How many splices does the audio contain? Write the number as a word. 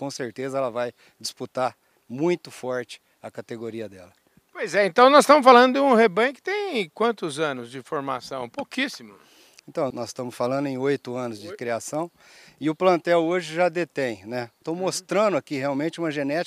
two